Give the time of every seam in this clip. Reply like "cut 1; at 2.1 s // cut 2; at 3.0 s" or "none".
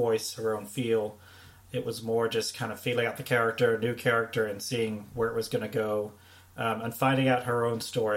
cut 1; at 1.6 s